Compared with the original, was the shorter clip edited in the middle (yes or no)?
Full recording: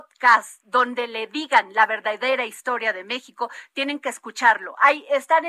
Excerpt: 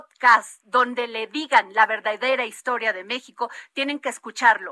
no